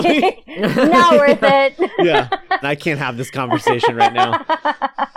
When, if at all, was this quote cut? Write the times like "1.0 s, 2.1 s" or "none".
2.6 s